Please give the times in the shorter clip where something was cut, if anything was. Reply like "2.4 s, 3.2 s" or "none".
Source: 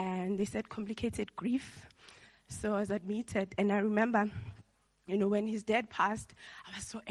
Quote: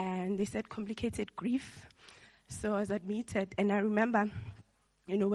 none